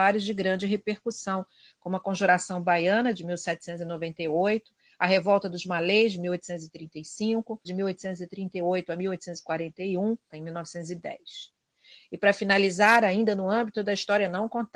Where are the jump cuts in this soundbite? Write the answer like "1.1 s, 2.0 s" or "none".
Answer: 7.6 s, 10.3 s